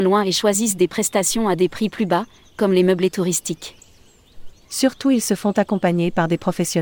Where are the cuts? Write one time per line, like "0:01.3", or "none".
0:04.5